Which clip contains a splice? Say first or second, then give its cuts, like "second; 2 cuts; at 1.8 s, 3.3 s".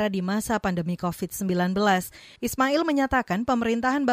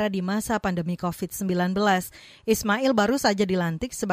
first; 1 cut; at 2.4 s